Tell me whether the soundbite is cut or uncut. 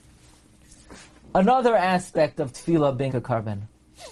cut